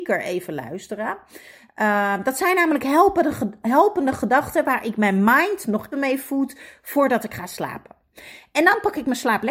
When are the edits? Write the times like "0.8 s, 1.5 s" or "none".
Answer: 5.9 s